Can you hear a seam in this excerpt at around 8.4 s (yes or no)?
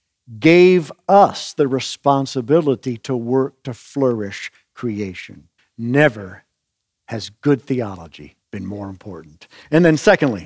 yes